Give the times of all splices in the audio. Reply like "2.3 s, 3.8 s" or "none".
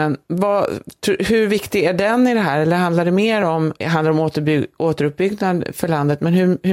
3.8 s